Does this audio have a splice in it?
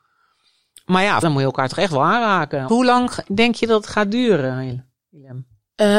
yes; 2 cuts; at 1.2 s, 2.7 s

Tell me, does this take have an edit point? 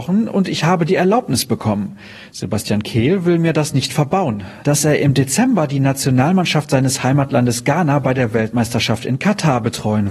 yes; 1 cut; at 4.6 s

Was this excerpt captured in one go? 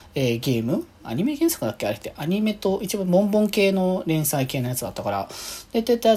yes; 0 cuts

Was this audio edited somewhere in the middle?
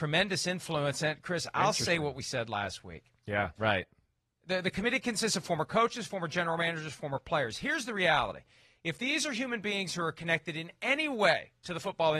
yes; 1 cut; at 3.6 s

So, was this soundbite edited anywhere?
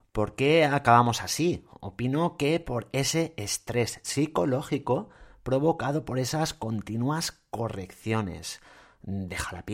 no; 0 cuts

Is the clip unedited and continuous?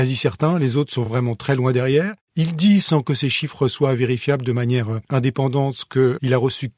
yes; 0 cuts

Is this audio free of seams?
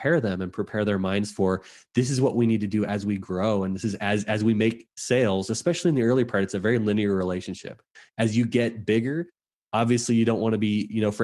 yes; 0 cuts

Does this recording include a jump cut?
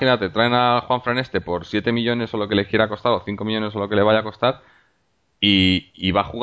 no; 0 cuts

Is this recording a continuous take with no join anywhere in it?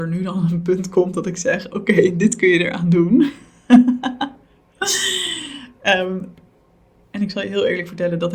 yes; 0 cuts

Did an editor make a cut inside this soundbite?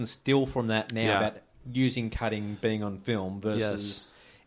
no; 0 cuts

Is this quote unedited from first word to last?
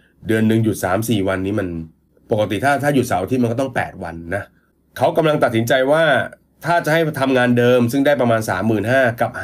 yes; 0 cuts

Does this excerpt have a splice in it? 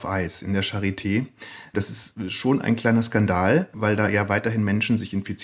no; 0 cuts

